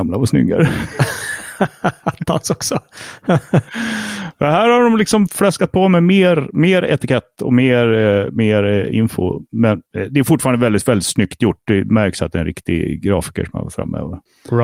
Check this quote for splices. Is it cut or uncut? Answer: uncut